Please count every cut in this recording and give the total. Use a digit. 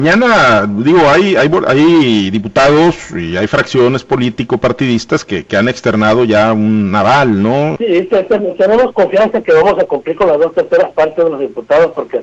1